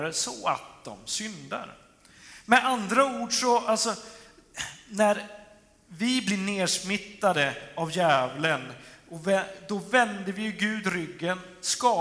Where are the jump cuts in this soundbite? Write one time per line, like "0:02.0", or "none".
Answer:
none